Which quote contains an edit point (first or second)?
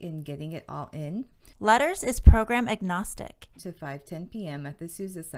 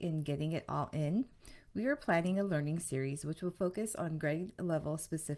first